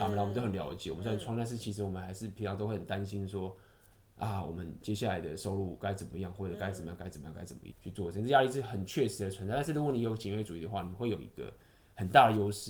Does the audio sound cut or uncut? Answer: cut